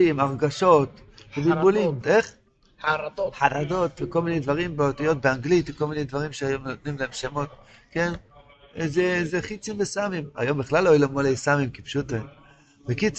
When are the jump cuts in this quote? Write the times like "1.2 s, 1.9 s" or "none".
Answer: 2.0 s